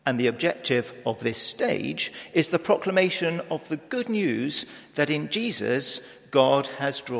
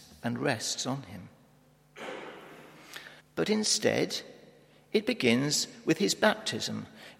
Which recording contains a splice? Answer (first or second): second